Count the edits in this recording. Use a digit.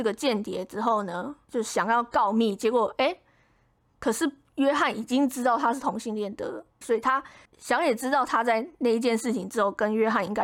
1